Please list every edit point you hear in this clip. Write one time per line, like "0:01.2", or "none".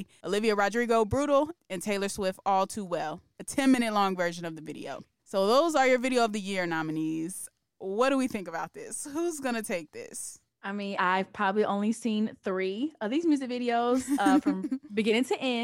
0:11.0